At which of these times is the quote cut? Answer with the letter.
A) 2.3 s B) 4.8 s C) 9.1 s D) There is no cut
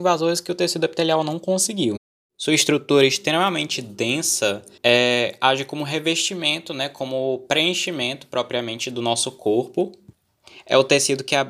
B